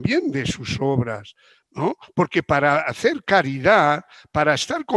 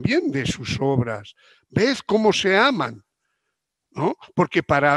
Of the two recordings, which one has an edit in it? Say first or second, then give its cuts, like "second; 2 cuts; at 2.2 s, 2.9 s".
first; 1 cut; at 1.6 s